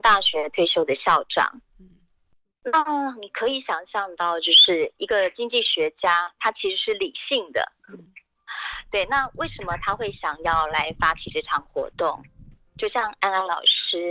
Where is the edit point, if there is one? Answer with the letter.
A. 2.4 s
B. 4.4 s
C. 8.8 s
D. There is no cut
D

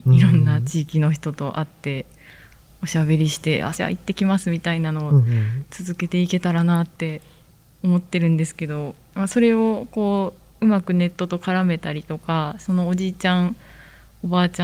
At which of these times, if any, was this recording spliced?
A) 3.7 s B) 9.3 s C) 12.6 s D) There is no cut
A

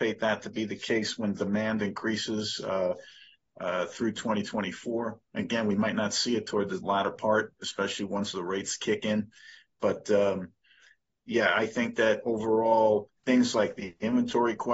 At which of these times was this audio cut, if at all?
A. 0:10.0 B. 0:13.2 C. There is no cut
B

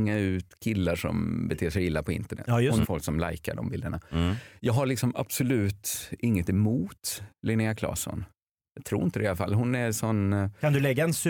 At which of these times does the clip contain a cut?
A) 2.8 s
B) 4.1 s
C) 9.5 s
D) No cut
A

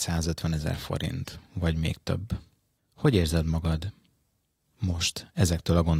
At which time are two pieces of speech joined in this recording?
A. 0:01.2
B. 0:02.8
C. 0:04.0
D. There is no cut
B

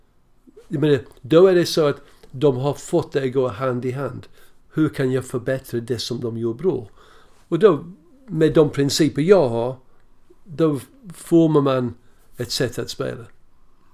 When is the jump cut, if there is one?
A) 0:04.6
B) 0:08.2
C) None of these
A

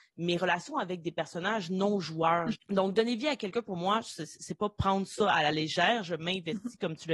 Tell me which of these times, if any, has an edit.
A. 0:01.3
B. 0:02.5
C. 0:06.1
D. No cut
B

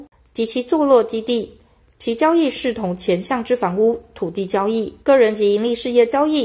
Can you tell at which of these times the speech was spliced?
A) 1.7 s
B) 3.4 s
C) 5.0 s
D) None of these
C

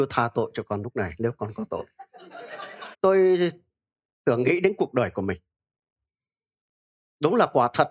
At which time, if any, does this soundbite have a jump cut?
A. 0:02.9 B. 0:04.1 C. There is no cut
A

